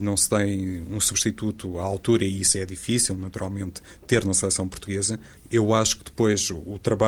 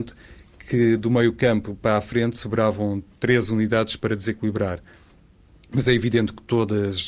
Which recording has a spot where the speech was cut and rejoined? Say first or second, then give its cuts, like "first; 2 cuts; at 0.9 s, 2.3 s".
first; 1 cut; at 5.4 s